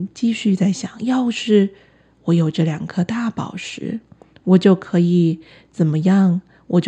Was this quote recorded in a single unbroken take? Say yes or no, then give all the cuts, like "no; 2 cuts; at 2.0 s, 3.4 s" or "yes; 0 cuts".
yes; 0 cuts